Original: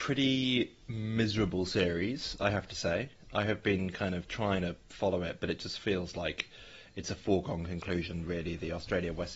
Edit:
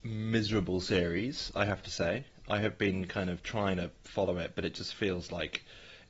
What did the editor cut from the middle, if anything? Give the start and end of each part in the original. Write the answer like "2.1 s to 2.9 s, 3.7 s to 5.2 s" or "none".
none

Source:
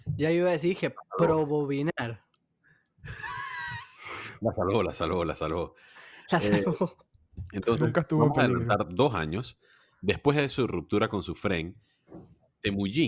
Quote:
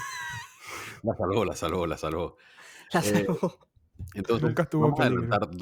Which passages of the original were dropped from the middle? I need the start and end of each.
none

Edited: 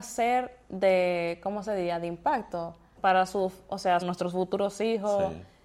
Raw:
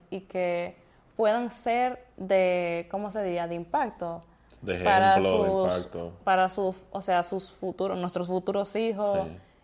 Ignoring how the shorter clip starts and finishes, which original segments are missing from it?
4.4 s to 6.2 s, 7.2 s to 8.0 s

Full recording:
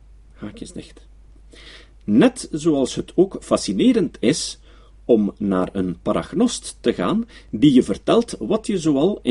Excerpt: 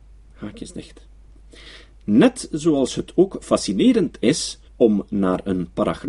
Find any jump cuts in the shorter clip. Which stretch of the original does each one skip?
4.7 s to 4.9 s

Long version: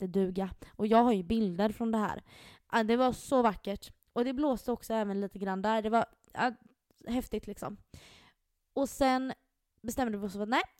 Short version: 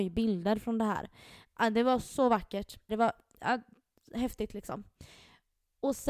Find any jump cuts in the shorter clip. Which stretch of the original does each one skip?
4.0 s to 5.8 s

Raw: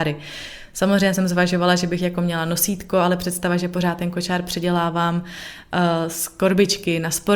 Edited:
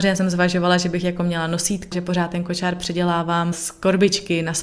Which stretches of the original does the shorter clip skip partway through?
2.9 s to 3.6 s, 5.2 s to 6.1 s

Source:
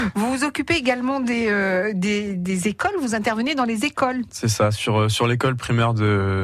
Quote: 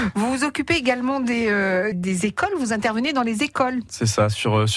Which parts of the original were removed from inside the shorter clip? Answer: 1.9 s to 2.3 s

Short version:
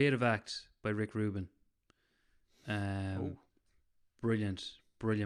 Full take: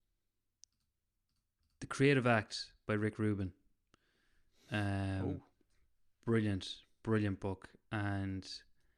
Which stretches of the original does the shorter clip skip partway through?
none

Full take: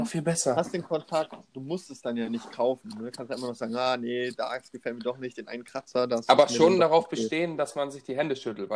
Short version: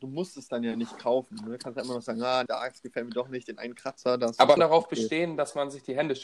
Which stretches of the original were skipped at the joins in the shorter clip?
4.0 s to 4.4 s, 6.5 s to 6.8 s

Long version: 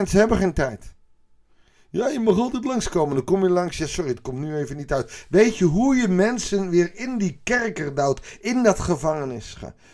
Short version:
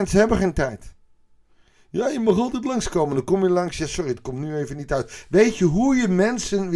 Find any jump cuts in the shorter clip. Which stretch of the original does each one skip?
none

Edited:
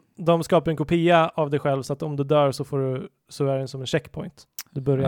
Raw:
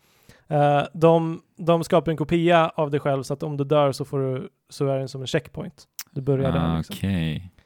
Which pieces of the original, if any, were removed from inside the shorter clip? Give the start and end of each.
none

